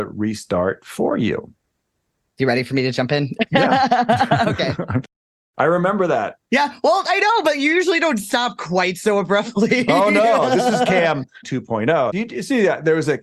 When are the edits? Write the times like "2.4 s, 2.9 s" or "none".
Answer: none